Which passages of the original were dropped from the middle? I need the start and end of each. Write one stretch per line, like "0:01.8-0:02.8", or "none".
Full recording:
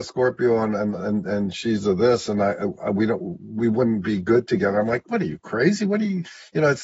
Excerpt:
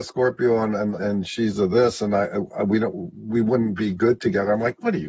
0:01.0-0:01.2